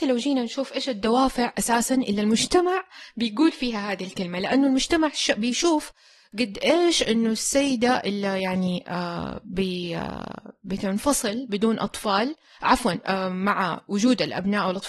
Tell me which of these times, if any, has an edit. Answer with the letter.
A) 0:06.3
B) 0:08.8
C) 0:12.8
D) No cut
D